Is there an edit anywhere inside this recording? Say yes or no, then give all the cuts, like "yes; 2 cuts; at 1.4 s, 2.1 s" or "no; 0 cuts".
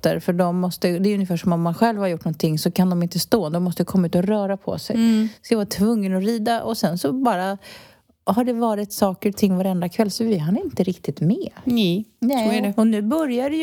no; 0 cuts